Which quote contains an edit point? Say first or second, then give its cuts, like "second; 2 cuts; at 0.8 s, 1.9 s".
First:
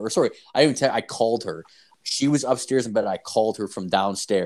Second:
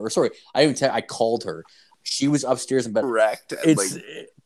second; 1 cut; at 3.0 s